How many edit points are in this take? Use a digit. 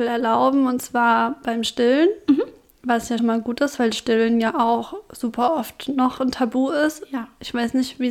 1